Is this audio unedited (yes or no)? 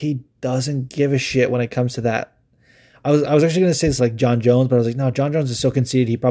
no